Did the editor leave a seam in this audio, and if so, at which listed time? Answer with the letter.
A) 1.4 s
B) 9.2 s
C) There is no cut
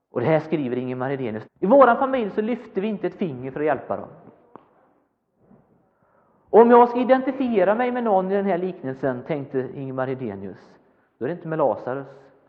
A